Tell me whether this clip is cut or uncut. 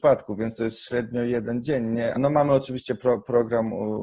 cut